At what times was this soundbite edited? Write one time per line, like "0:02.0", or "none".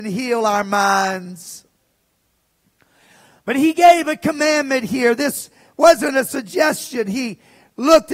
none